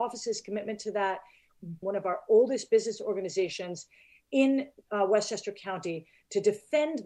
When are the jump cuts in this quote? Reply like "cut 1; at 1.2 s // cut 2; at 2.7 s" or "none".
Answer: cut 1; at 1.8 s

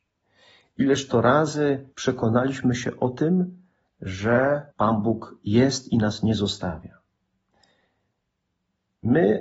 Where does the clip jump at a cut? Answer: cut 1; at 1.9 s // cut 2; at 4.7 s

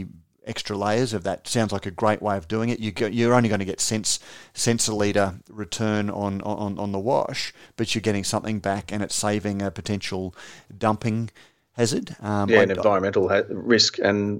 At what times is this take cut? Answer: none

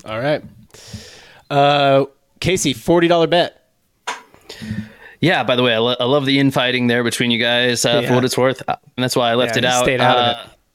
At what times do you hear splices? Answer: cut 1; at 9.0 s

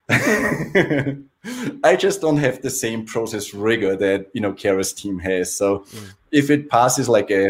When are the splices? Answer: none

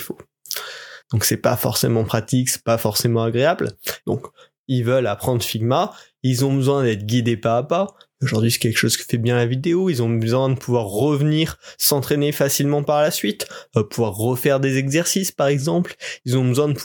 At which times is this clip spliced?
cut 1; at 1.0 s // cut 2; at 4.0 s

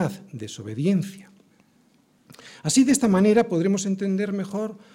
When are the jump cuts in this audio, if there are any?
none

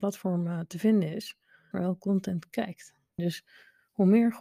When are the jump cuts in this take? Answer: cut 1; at 1.7 s // cut 2; at 3.2 s

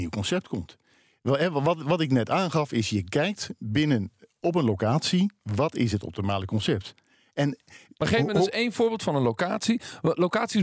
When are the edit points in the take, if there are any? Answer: none

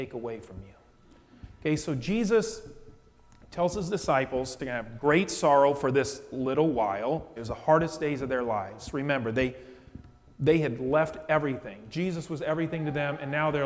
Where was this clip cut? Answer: cut 1; at 4.6 s // cut 2; at 7.4 s

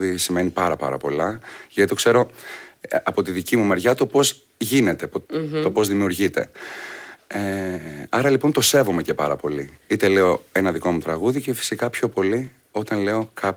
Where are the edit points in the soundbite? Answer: cut 1; at 5.2 s

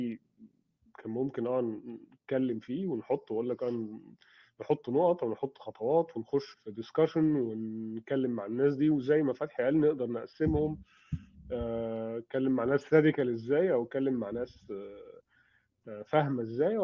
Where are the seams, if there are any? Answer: cut 1; at 6.5 s

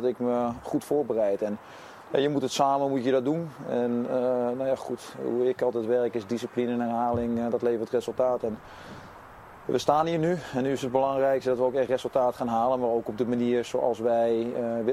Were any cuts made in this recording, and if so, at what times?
none

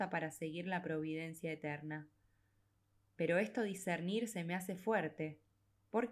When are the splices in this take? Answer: none

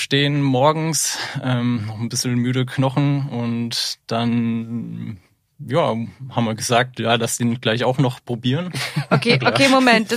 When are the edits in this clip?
none

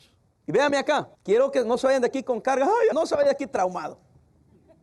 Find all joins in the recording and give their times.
cut 1; at 1.1 s // cut 2; at 2.9 s

